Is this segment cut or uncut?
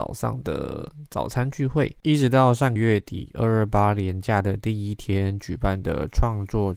cut